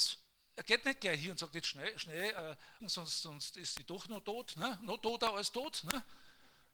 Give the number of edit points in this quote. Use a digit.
1